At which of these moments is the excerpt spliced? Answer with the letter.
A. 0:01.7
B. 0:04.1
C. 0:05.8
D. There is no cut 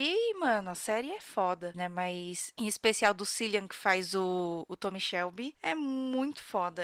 A